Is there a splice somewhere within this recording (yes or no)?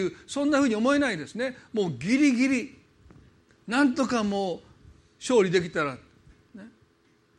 no